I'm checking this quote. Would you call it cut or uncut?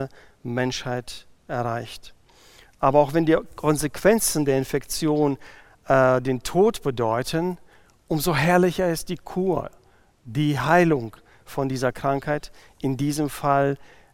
uncut